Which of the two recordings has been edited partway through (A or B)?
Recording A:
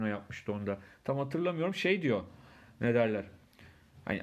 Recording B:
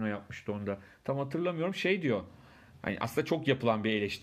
B